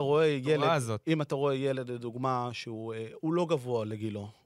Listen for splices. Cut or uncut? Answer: uncut